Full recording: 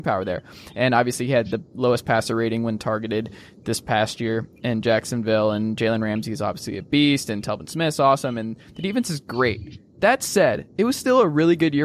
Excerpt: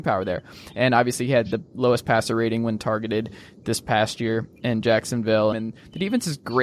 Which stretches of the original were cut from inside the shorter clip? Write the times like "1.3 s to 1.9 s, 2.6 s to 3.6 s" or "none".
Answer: 5.5 s to 8.3 s